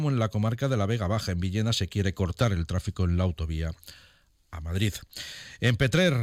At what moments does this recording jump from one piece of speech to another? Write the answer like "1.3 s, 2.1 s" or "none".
none

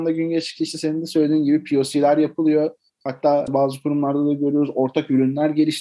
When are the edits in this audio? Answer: none

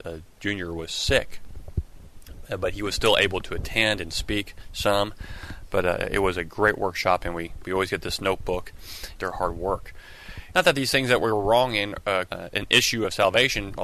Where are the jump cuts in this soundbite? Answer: 9.2 s, 10.5 s, 12.3 s

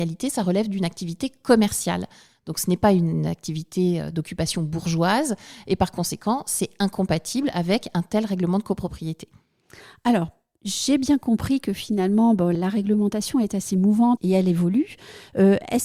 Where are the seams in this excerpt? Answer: 12.5 s, 14.2 s

